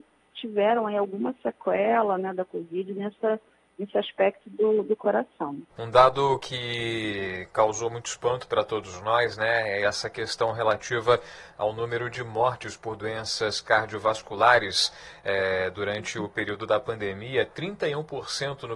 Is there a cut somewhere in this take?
yes; 1 cut; at 5.7 s

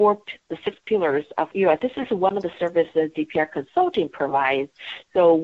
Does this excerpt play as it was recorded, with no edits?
no; 1 cut; at 1.8 s

